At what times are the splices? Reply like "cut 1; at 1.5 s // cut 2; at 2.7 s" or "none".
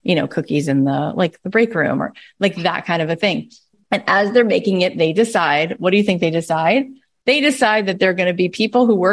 cut 1; at 3.7 s